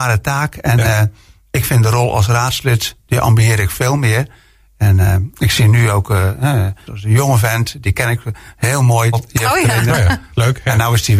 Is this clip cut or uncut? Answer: cut